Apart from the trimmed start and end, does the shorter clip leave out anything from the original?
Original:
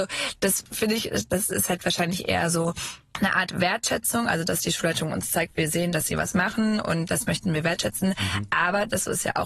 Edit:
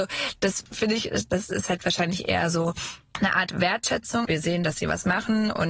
yes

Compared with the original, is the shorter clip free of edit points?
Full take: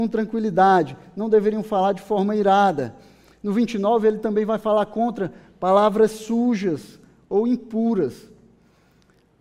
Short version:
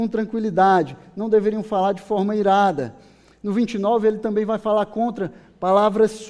yes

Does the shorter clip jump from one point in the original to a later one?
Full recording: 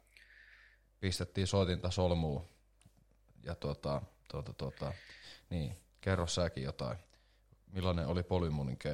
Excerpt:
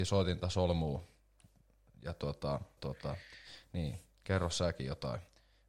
yes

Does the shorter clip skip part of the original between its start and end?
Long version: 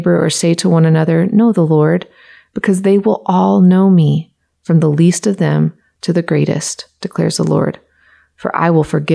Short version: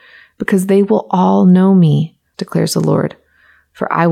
yes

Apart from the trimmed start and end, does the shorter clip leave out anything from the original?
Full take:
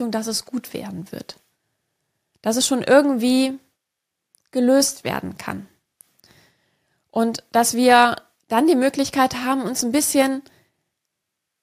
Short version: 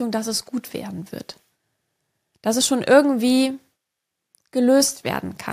no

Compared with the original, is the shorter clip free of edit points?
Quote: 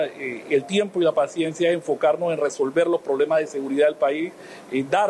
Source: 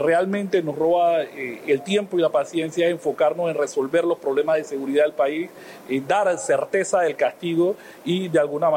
yes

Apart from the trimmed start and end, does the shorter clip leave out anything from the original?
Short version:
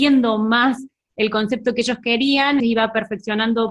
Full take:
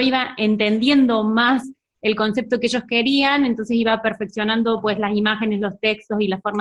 yes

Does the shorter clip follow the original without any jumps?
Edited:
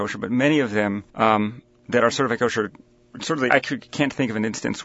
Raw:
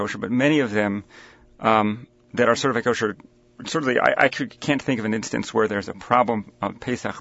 no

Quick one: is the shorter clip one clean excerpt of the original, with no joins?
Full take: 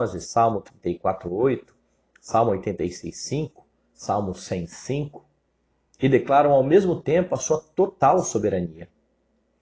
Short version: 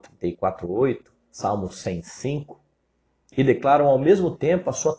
no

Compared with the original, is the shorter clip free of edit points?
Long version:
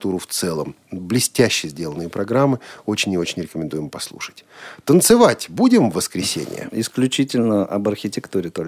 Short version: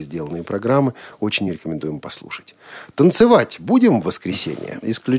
no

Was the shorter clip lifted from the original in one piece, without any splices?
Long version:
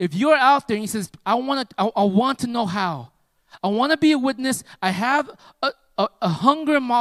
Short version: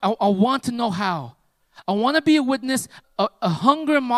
no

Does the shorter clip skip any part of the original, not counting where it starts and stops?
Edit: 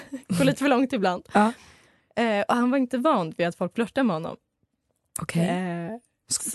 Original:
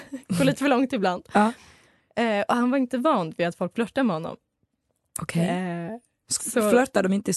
no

